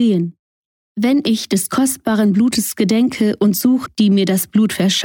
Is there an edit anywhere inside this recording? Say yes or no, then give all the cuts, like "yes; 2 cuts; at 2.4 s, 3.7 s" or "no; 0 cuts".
yes; 1 cut; at 3.9 s